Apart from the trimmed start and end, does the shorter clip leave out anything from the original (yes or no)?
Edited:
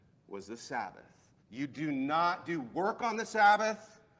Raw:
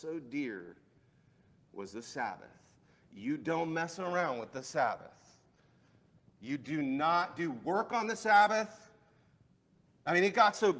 yes